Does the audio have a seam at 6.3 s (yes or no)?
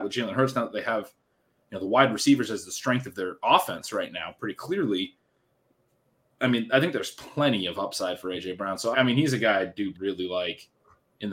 no